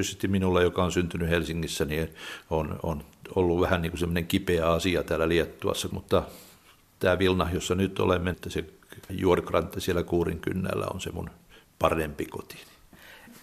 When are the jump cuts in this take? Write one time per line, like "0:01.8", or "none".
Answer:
0:05.9
0:08.3